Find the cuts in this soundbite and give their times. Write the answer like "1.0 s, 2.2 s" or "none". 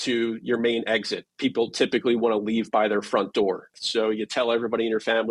3.7 s